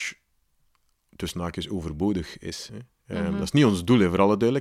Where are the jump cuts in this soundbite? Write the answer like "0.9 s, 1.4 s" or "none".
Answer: none